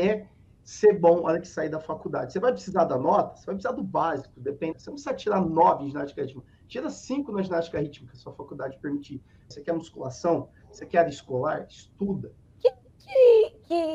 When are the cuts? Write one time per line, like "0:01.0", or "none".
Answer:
0:04.7
0:09.5
0:12.4